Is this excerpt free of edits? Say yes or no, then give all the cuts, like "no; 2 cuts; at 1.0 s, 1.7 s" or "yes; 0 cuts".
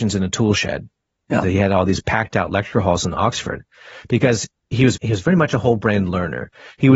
no; 2 cuts; at 1.4 s, 4.9 s